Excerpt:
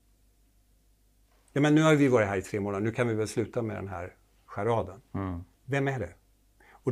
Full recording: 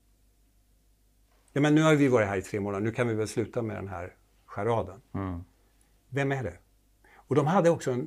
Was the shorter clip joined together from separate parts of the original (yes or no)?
yes